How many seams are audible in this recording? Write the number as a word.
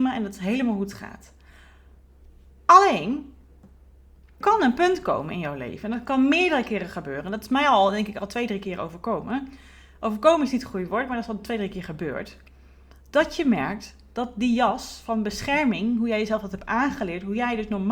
one